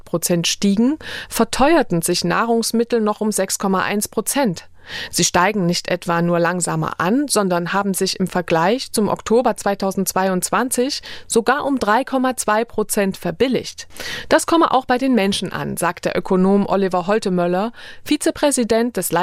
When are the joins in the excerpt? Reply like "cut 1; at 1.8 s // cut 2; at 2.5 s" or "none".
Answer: cut 1; at 5.1 s